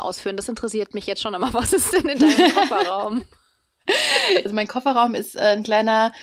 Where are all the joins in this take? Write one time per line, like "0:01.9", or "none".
none